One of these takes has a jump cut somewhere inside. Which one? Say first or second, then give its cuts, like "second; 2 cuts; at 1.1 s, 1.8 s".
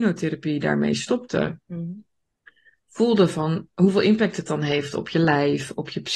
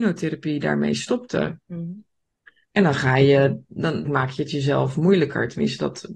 second; 2 cuts; at 2.6 s, 4.1 s